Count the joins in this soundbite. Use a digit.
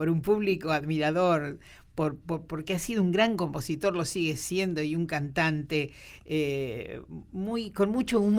0